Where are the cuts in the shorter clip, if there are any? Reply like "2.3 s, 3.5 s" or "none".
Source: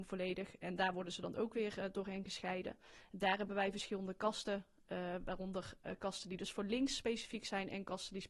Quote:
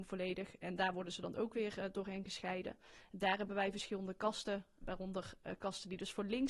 4.8 s